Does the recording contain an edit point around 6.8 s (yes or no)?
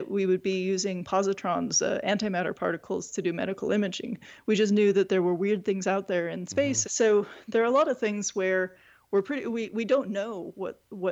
yes